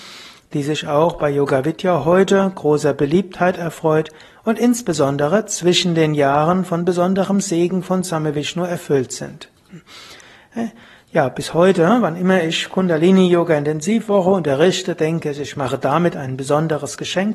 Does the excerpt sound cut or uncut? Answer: uncut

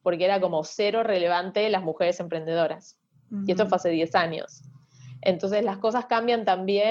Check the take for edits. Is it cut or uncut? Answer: uncut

